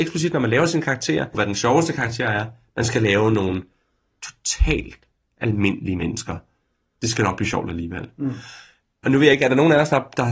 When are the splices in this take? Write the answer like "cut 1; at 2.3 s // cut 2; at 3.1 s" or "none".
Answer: cut 1; at 1.3 s